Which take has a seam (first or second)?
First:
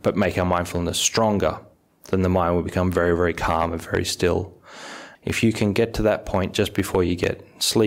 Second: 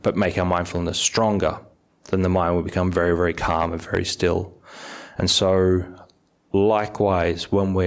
first